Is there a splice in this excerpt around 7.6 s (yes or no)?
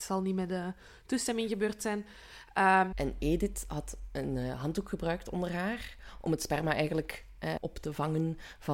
yes